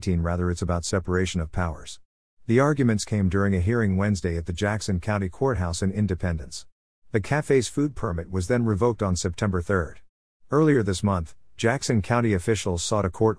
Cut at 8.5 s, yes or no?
no